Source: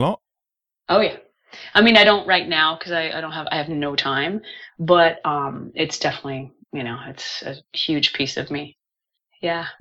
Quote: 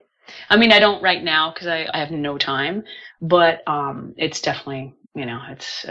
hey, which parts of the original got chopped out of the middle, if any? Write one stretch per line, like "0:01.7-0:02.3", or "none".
0:03.1-0:03.4